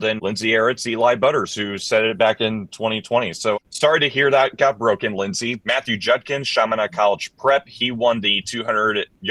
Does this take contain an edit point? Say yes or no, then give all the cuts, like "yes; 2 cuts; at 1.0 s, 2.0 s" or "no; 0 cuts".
yes; 2 cuts; at 3.5 s, 5.6 s